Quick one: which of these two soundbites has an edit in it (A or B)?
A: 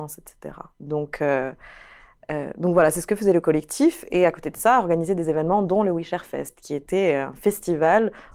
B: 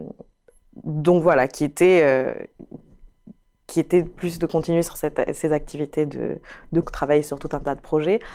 B